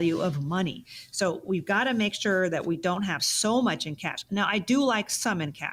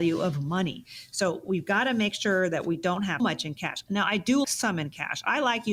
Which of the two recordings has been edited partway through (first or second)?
second